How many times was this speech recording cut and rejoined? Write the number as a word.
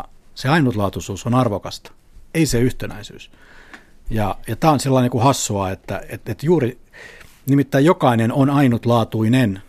zero